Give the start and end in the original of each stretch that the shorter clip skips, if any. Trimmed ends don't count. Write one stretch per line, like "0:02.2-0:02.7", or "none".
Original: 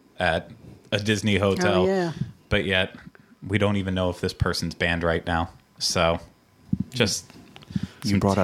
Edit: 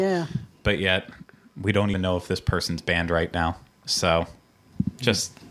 0:03.8-0:03.9